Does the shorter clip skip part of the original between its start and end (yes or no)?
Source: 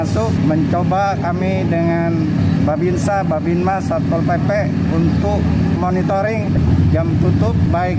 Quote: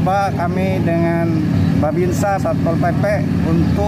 yes